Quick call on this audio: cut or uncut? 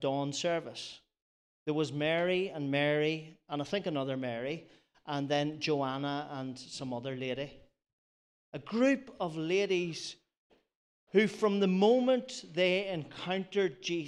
uncut